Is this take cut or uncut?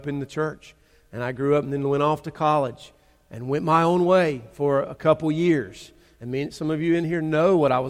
uncut